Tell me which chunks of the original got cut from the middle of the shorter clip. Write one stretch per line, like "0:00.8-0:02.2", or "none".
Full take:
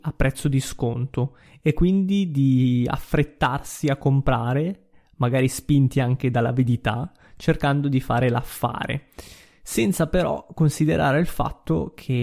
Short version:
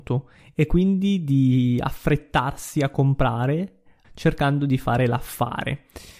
0:05.1-0:07.3